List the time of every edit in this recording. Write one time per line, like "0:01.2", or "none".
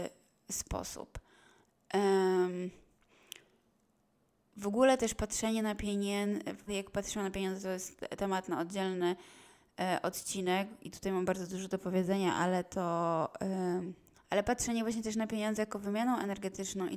0:06.7
0:14.1